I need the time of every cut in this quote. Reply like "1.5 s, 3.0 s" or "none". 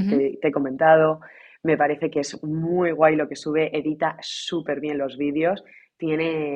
none